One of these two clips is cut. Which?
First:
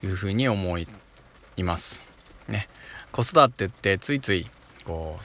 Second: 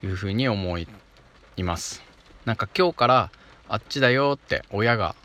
second; 1 cut; at 2.4 s

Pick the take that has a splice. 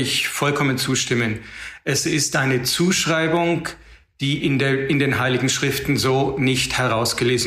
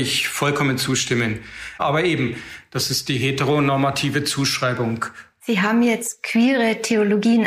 second; 2 cuts; at 1.8 s, 5.4 s

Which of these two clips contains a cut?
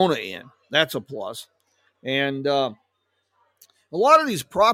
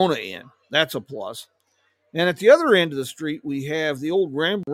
first; 1 cut; at 1.9 s

